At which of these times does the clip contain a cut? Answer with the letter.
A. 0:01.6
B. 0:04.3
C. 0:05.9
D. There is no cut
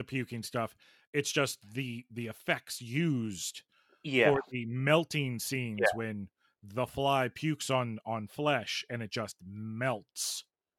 D